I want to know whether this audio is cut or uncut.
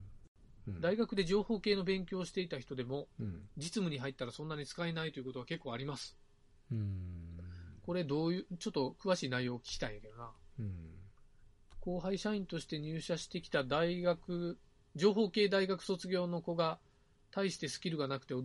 uncut